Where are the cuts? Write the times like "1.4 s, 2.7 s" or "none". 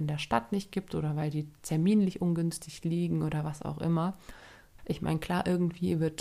4.8 s

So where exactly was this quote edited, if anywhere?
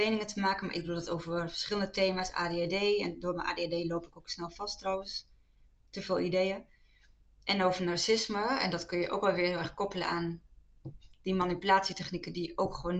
none

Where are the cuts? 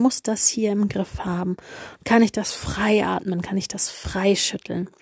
none

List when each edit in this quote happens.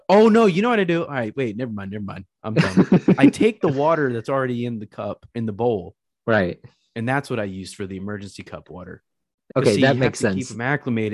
9.5 s

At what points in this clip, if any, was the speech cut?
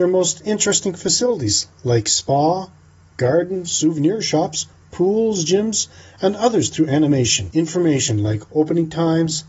none

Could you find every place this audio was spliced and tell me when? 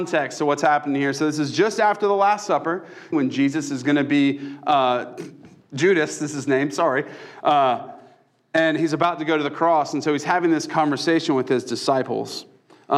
3.1 s, 5.2 s

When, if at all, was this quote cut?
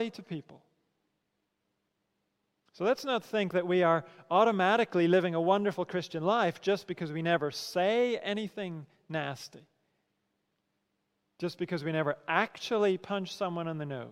none

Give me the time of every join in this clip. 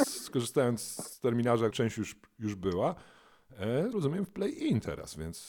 1.7 s, 3.9 s

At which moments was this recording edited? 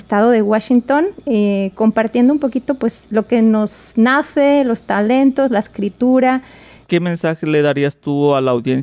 3.0 s, 6.8 s

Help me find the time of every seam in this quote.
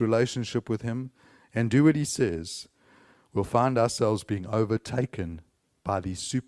none

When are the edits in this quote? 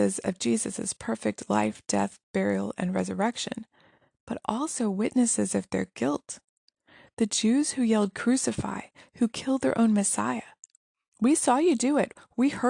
none

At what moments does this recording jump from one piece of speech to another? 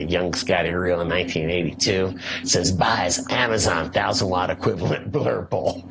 none

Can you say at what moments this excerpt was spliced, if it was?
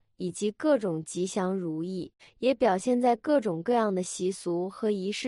2.2 s

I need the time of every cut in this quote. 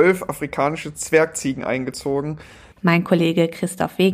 2.7 s

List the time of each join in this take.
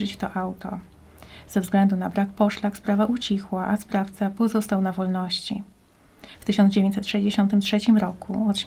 none

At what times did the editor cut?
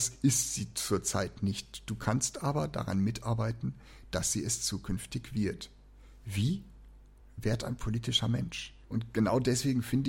7.2 s, 8.8 s

